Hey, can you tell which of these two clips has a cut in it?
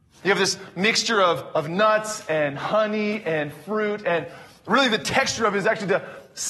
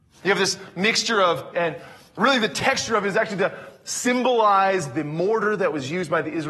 second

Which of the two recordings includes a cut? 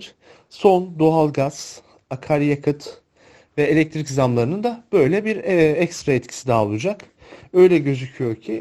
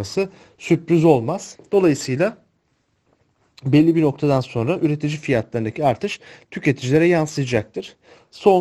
second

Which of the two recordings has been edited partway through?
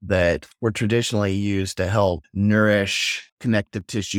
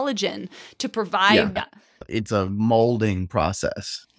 second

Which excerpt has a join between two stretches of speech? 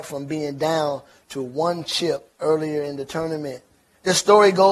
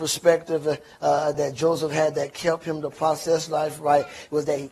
second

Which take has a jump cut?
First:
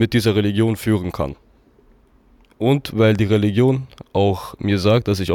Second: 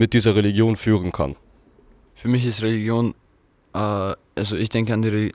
second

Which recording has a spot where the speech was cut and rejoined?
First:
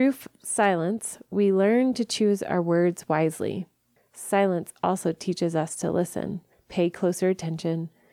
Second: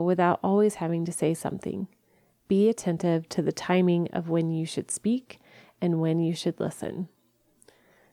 first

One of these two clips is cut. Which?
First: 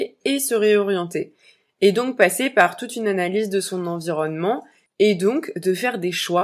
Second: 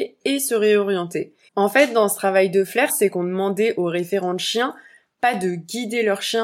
second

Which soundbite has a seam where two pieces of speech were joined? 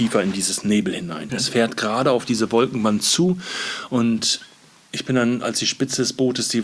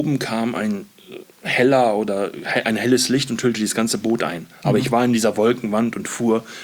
first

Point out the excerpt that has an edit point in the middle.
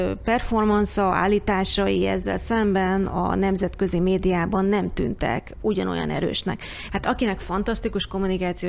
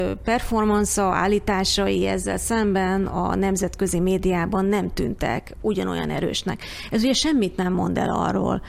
first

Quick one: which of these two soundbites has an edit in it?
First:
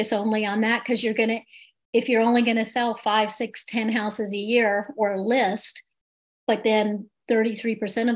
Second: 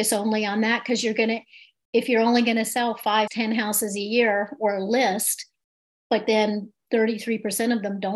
second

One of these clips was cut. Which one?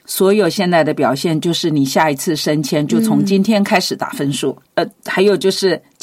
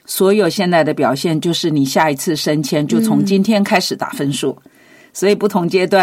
first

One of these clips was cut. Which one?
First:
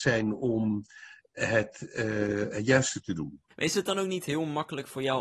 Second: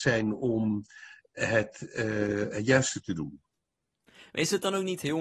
first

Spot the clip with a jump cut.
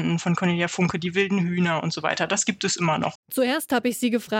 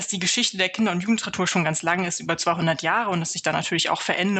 first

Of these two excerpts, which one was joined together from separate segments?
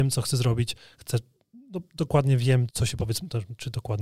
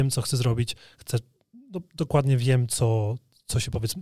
first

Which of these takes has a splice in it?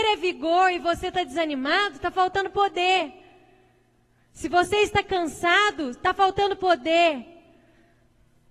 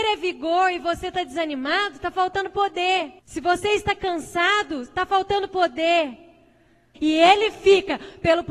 second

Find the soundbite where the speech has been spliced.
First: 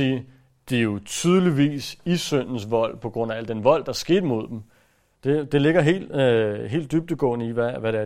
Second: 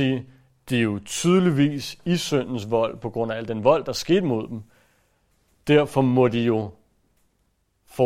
first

